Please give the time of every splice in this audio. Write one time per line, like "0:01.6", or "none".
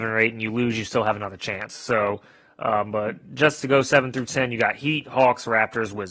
none